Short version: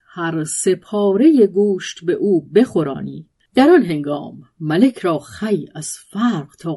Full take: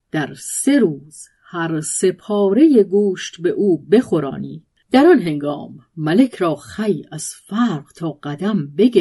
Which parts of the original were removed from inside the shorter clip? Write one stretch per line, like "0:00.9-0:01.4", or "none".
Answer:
none